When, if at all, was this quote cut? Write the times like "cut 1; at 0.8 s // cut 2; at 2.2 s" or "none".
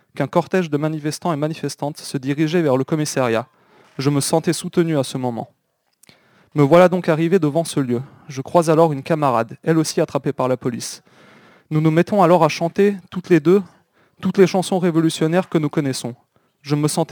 none

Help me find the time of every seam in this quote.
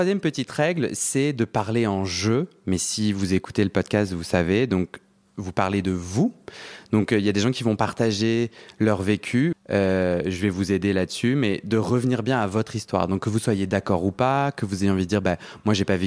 cut 1; at 9.5 s

